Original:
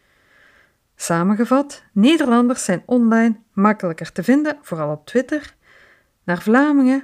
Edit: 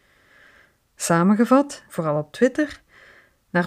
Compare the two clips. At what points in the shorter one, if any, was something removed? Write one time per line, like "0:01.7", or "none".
0:01.9